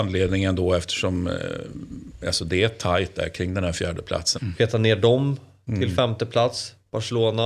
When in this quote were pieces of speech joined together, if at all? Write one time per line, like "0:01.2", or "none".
0:04.4